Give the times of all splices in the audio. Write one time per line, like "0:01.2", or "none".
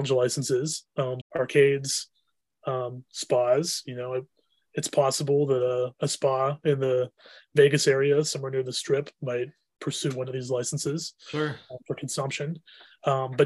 0:01.2